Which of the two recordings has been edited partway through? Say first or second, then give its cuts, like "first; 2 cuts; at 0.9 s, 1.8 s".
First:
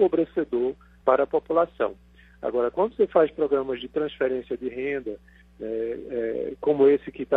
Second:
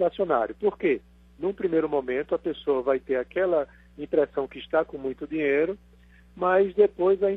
first; 1 cut; at 1.0 s